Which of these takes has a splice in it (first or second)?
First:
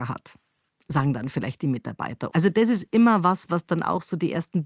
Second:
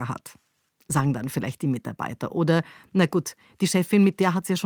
first